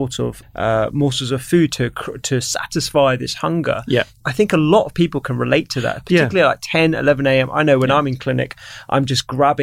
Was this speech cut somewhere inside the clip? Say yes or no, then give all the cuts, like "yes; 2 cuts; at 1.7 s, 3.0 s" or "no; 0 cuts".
no; 0 cuts